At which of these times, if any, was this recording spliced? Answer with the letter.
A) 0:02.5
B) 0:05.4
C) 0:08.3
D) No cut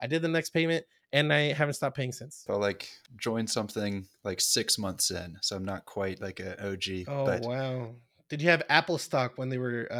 A